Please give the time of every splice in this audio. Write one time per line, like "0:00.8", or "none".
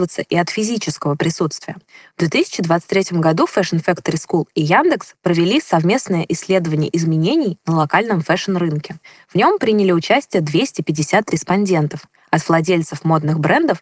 none